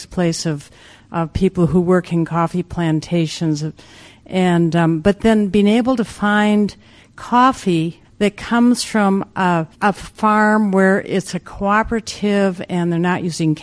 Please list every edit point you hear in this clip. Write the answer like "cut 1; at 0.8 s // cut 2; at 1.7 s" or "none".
cut 1; at 8.0 s // cut 2; at 9.7 s